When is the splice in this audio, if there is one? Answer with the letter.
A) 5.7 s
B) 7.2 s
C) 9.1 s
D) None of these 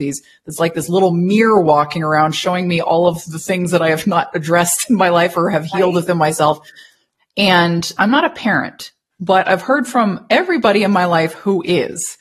B